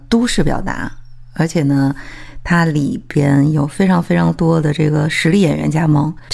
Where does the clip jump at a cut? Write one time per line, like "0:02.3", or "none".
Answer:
none

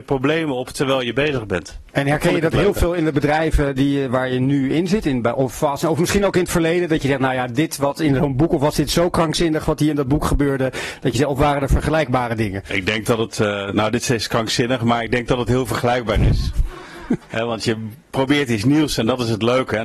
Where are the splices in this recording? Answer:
0:01.9

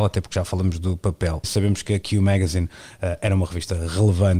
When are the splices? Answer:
0:01.4

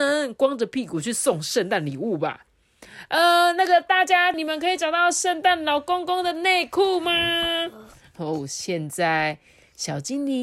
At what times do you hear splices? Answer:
0:04.3

